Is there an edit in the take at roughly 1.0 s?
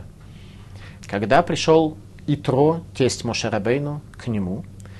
yes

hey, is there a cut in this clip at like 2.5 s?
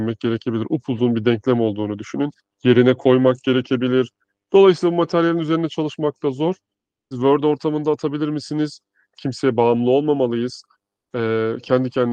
yes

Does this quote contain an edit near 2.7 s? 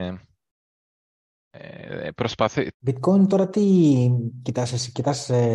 yes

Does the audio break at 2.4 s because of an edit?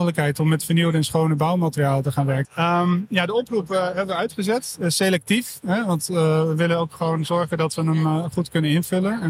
yes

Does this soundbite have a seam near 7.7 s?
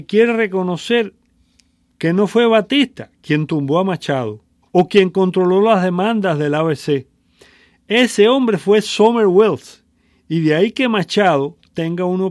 no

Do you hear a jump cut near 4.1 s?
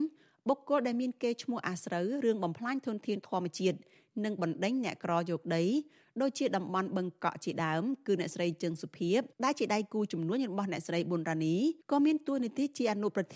no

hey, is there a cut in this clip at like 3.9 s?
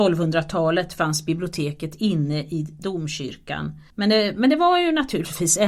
yes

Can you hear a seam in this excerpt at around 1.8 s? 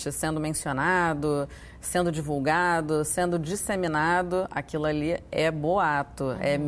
no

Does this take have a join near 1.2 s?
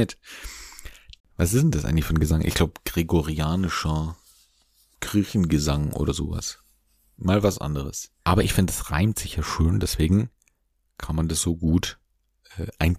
yes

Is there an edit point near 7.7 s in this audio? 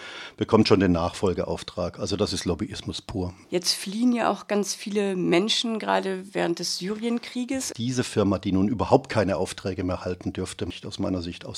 yes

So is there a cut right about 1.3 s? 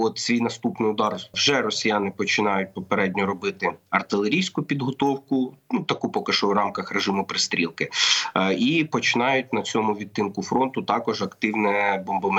yes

